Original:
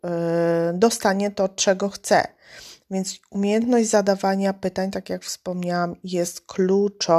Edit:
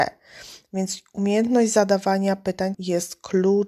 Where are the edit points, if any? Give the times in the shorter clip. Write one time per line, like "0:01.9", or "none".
0:02.7